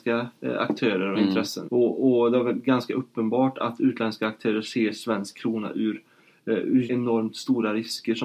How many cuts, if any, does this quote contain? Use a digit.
2